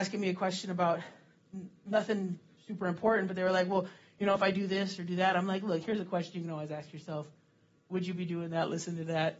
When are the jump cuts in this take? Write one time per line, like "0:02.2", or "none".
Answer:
none